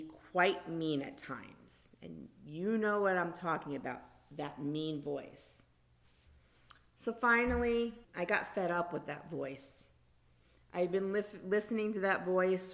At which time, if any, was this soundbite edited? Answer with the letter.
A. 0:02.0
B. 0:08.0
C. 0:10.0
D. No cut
B